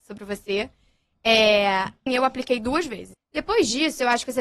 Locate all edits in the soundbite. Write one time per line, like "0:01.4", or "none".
0:02.1
0:03.1

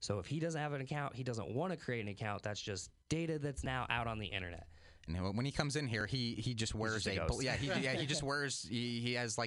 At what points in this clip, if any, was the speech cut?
0:03.0
0:05.1

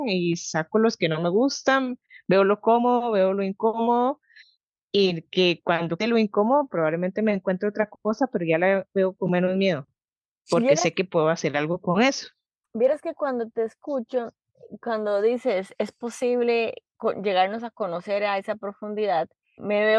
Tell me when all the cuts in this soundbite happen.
0:06.0

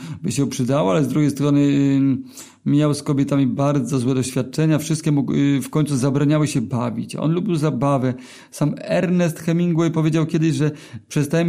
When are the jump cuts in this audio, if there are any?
none

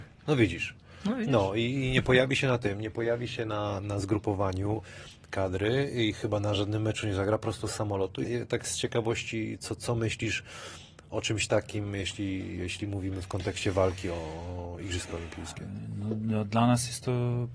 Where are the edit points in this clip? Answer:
0:08.2

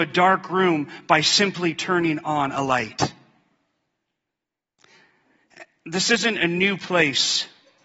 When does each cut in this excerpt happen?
none

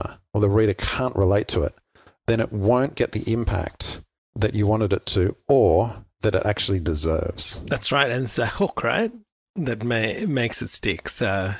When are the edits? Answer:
none

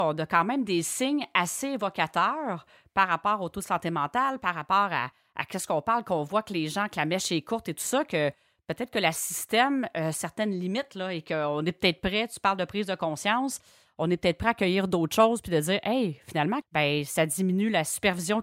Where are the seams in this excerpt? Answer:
0:16.6

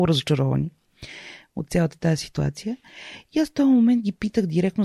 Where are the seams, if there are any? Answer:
none

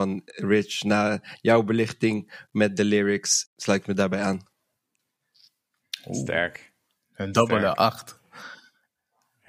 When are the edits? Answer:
0:03.5

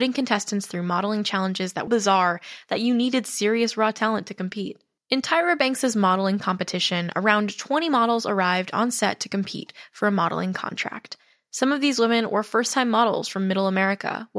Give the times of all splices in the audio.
0:01.9
0:05.0

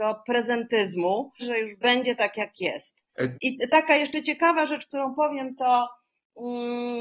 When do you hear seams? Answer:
0:01.4
0:03.3

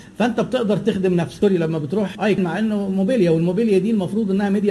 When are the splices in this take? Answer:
0:02.1

